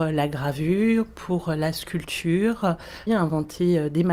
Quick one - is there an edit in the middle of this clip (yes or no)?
yes